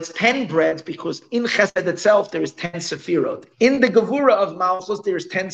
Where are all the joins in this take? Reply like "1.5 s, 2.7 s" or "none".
3.5 s